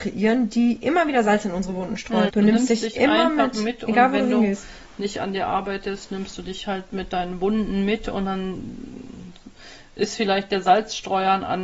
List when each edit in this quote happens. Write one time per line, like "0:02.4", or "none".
0:02.3